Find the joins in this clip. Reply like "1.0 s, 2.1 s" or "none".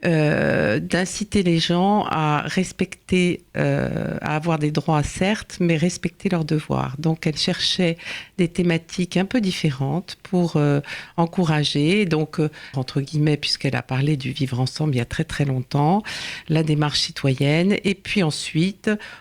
12.7 s